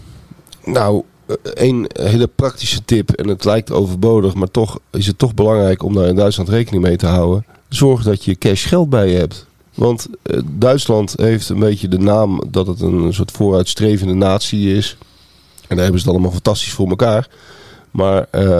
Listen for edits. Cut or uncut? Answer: uncut